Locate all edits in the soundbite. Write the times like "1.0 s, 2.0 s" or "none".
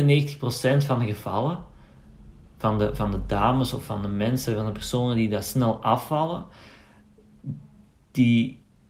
none